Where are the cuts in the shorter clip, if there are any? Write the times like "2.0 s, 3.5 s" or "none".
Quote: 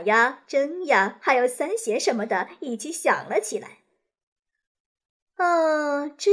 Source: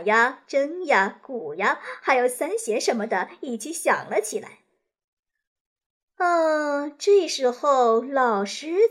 1.2 s